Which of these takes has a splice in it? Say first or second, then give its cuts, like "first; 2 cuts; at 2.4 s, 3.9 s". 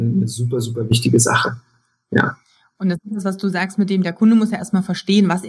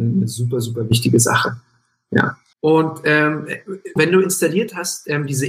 second; 2 cuts; at 2.5 s, 4.0 s